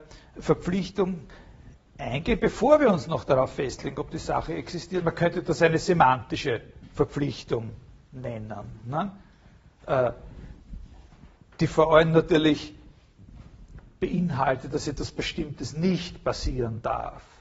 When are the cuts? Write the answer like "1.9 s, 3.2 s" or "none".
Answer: none